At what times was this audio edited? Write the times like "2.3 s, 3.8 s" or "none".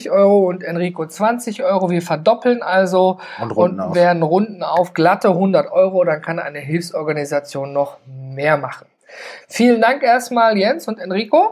none